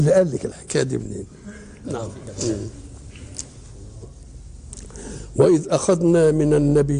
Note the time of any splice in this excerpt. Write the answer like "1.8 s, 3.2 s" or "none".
1.8 s